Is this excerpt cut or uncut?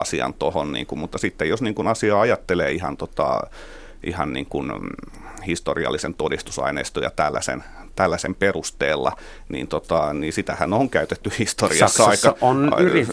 uncut